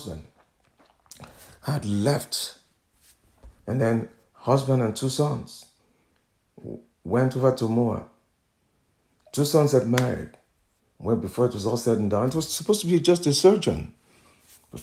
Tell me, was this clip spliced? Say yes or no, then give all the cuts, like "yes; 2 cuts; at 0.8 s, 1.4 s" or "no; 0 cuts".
no; 0 cuts